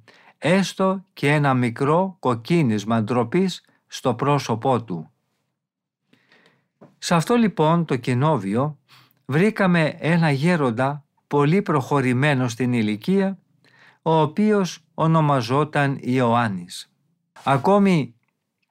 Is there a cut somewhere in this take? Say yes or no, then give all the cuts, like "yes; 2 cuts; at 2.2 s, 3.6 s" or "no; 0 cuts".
yes; 1 cut; at 17.4 s